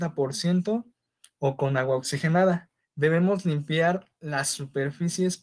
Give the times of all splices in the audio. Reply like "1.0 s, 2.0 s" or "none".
2.8 s